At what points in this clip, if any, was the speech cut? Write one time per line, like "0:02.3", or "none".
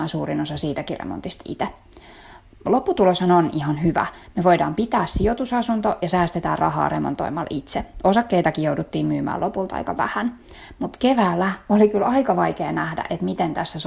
none